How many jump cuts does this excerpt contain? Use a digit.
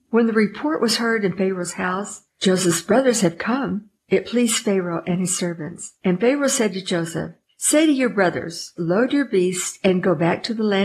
1